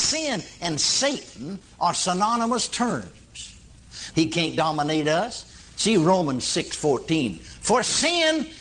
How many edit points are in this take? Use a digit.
1